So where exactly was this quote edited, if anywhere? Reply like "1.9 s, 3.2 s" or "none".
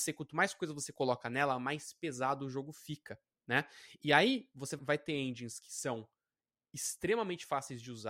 4.8 s